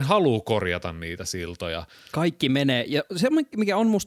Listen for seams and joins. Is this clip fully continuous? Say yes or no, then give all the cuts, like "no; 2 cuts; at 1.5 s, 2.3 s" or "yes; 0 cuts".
no; 1 cut; at 1.9 s